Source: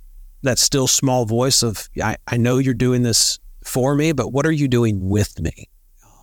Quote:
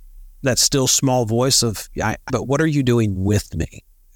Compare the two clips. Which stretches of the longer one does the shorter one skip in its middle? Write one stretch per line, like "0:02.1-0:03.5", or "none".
0:02.3-0:04.1